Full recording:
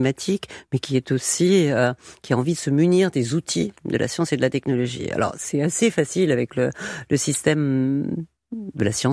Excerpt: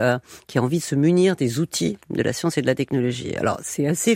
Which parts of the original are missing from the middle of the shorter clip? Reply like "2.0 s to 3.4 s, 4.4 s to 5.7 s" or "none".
none